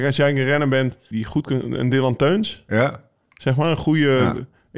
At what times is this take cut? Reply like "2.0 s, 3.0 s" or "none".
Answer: 1.1 s